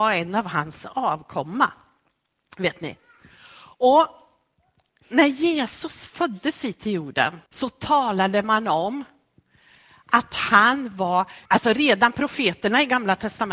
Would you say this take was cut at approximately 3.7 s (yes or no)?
no